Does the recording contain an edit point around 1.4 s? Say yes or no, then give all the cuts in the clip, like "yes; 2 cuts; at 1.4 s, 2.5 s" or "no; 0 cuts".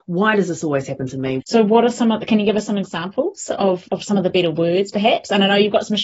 yes; 2 cuts; at 1.4 s, 3.9 s